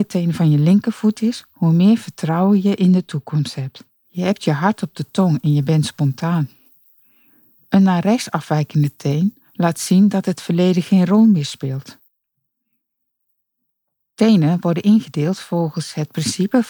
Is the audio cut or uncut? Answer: cut